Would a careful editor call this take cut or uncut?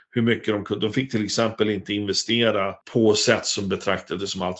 cut